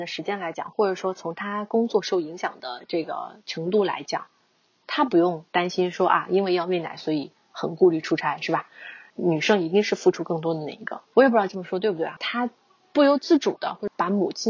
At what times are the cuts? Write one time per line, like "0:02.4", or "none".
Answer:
0:11.1
0:12.2

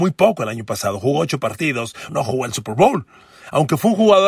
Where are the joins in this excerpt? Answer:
0:02.1

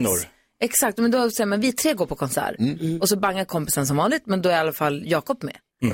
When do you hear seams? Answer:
none

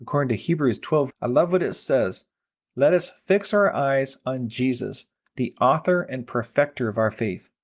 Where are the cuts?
0:01.1

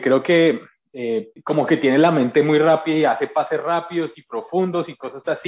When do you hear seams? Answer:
0:01.4

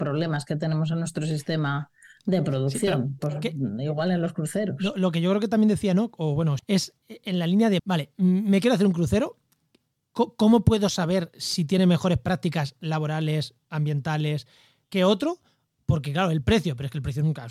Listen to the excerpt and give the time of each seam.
0:06.6
0:07.8
0:14.8

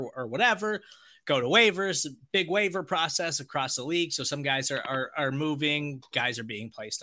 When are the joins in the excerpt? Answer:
none

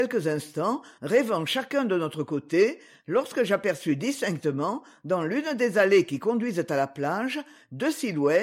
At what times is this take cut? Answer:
none

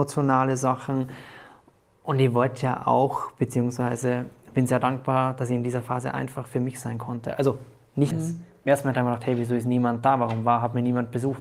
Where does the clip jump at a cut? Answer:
0:08.1

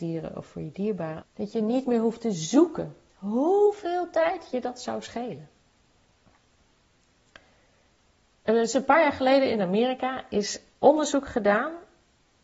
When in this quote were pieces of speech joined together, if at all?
0:01.2

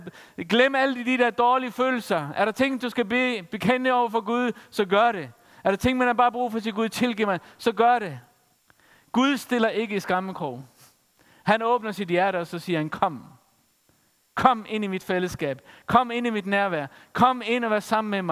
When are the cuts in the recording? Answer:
none

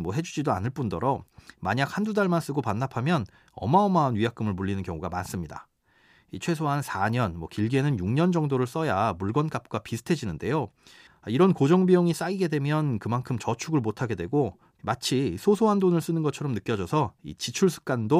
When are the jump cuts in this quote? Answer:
0:11.1

